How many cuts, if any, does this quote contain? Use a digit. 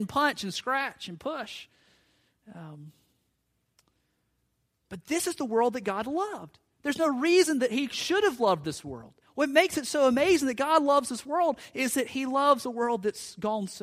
1